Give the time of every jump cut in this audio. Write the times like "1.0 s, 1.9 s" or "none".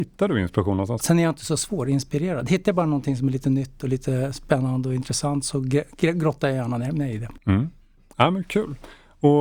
1.0 s

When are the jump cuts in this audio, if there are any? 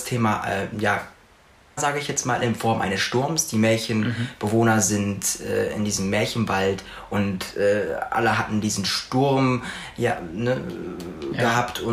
1.8 s

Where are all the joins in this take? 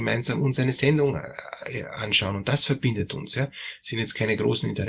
none

